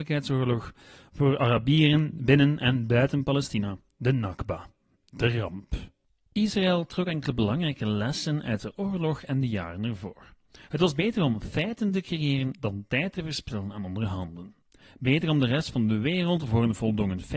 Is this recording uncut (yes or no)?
yes